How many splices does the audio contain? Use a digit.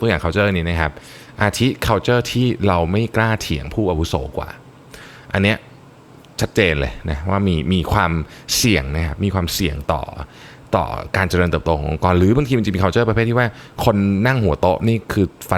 0